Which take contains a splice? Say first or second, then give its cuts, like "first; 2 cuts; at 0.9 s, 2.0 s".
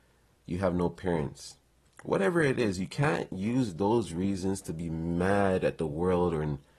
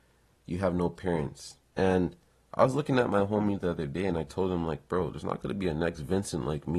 second; 1 cut; at 1.7 s